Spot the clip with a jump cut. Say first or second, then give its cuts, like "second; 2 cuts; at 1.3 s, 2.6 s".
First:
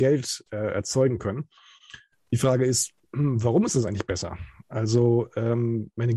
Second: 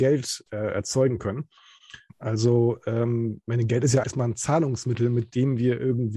second; 2 cuts; at 2.1 s, 4.0 s